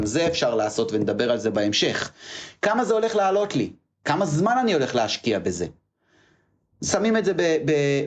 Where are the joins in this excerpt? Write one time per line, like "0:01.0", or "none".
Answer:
none